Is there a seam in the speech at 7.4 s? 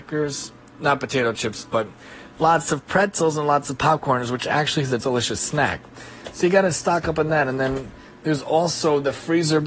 no; 1 cut; at 5.0 s

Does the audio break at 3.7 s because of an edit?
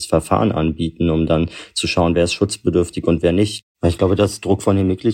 yes; 1 cut; at 3.7 s

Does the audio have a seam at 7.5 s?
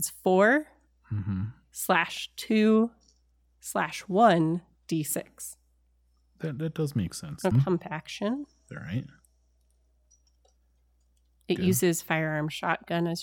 yes; 1 cut; at 7.5 s

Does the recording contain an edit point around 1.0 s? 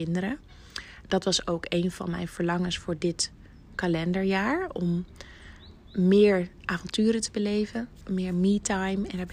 no; 2 cuts; at 3.7 s, 8.0 s

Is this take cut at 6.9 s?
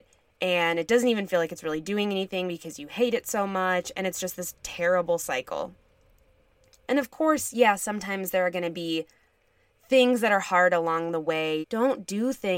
yes; 2 cuts; at 6.9 s, 11.6 s

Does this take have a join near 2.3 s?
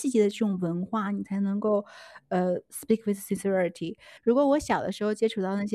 no; 1 cut; at 4.2 s

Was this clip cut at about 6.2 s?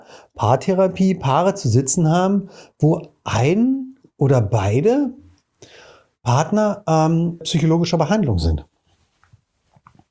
no; 1 cut; at 7.4 s

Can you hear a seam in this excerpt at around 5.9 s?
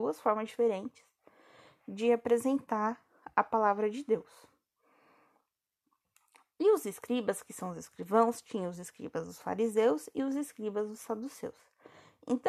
no; 0 cuts

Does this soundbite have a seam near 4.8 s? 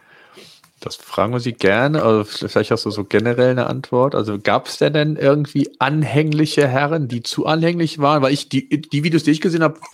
no; 0 cuts

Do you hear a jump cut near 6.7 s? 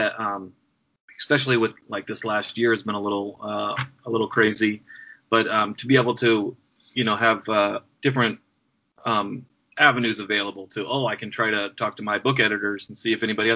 no; 0 cuts

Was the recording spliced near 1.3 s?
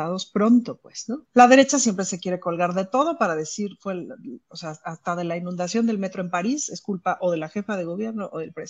yes; 1 cut; at 1.3 s

